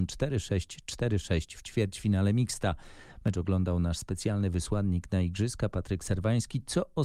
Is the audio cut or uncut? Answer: uncut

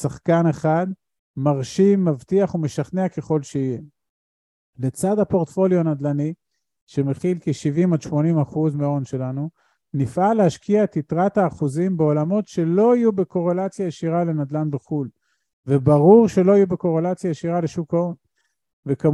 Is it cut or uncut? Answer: uncut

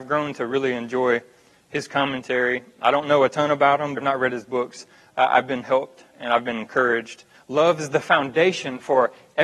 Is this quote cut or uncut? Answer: cut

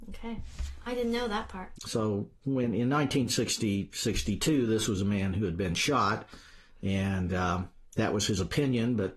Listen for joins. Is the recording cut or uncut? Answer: cut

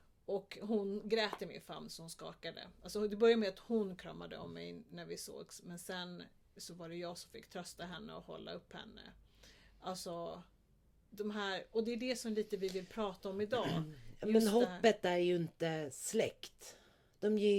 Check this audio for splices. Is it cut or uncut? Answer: uncut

